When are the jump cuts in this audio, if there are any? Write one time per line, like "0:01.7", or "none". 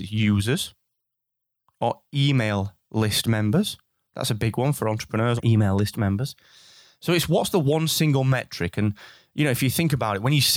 0:05.4